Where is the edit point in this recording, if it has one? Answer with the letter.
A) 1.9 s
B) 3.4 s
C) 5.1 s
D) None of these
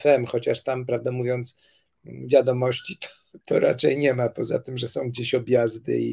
B